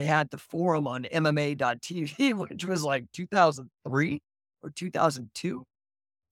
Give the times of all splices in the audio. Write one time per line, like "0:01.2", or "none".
none